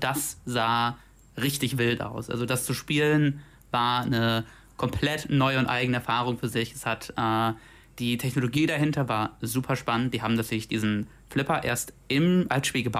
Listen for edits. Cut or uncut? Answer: uncut